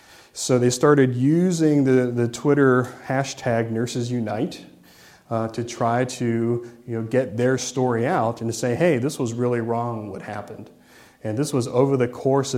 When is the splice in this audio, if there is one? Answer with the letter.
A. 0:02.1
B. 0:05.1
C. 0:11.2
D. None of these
D